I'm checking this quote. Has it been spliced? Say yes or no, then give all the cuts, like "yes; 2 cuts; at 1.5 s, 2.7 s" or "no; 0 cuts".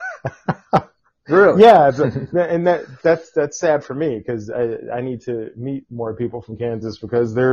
no; 0 cuts